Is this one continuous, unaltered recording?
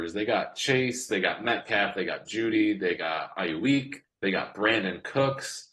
no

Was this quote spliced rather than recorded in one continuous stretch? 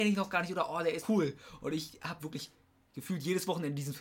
yes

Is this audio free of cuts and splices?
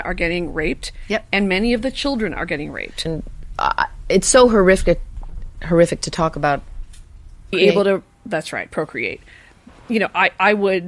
no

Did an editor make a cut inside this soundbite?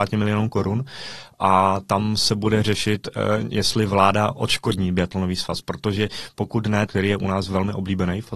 yes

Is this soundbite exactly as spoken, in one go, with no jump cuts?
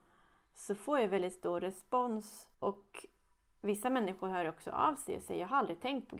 no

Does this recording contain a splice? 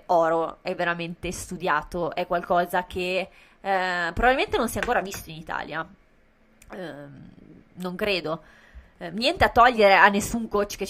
no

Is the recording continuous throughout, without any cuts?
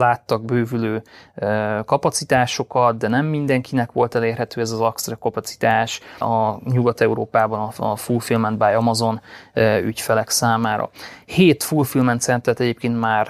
no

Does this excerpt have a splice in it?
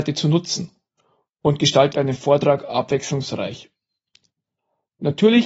yes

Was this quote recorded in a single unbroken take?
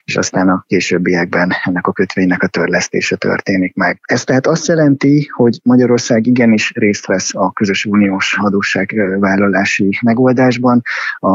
yes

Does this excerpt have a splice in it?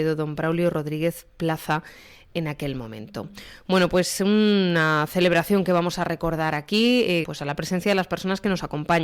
yes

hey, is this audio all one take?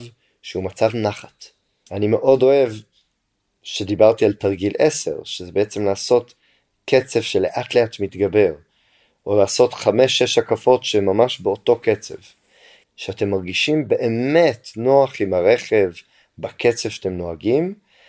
no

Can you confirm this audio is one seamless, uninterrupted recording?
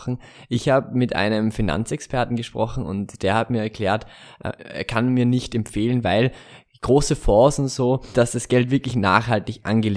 no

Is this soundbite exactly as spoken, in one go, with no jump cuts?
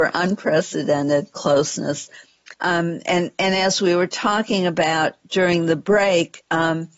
no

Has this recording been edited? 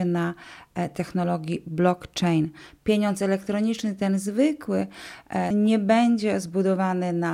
yes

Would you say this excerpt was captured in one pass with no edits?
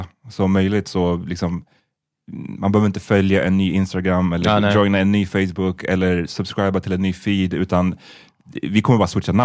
yes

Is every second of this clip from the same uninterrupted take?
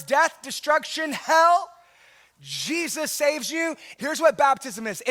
no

